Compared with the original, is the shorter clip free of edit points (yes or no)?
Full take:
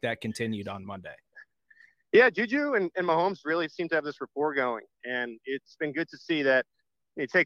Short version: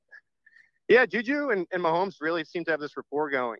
yes